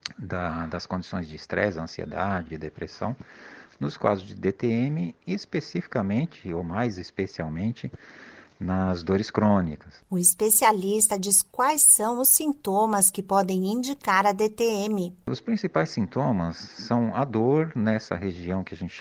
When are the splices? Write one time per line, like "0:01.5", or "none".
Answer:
none